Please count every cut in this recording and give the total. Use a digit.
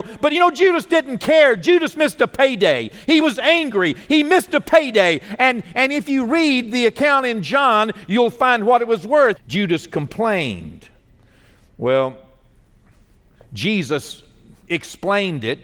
1